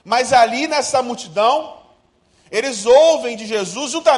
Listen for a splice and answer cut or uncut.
uncut